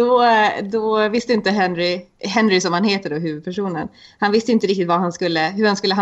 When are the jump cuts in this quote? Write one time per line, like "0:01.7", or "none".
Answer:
none